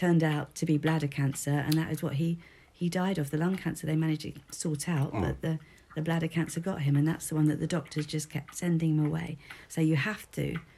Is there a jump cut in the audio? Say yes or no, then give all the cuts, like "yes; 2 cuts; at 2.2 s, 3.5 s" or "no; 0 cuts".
no; 0 cuts